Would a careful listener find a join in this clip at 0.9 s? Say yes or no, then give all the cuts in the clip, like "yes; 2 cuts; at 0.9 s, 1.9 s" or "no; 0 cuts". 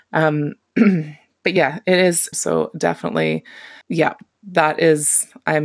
no; 2 cuts; at 2.3 s, 3.8 s